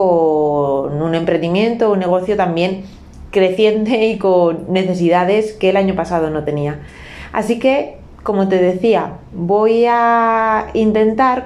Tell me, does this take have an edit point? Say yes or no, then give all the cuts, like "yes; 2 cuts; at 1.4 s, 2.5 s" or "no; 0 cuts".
no; 0 cuts